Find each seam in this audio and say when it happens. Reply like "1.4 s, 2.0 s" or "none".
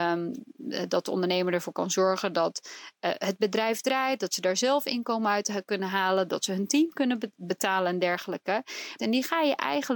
7.3 s, 9.0 s